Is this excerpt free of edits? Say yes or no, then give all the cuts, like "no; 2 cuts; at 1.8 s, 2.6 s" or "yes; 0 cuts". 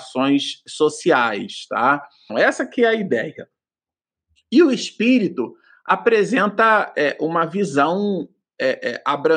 no; 1 cut; at 2.3 s